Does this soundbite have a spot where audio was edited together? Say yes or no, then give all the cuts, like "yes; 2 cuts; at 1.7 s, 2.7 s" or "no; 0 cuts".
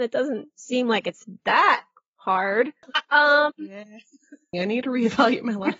yes; 2 cuts; at 2.8 s, 4.5 s